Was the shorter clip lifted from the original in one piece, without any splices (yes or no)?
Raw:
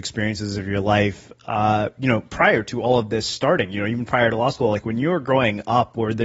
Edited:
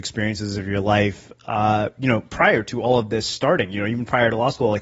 yes